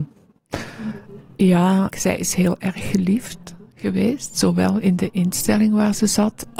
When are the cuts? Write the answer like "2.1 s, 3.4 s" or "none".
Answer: 1.9 s